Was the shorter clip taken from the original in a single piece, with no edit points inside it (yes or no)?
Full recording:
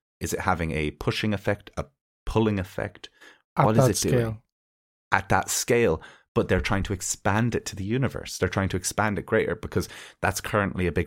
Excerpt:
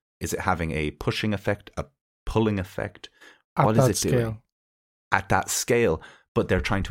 yes